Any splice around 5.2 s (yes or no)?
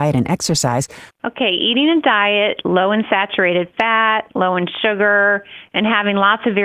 no